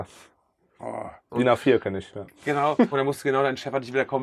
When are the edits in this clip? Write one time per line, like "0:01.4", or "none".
0:01.3
0:02.9